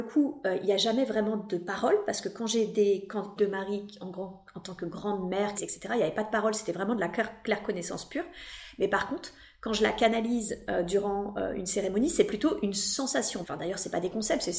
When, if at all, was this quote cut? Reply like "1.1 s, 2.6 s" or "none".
3.4 s, 5.5 s, 13.4 s